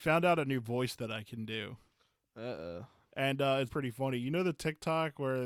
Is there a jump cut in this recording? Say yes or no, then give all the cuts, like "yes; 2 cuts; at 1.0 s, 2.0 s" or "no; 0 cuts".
yes; 1 cut; at 3.7 s